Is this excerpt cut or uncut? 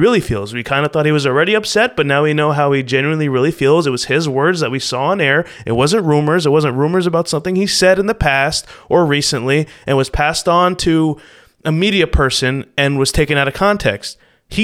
uncut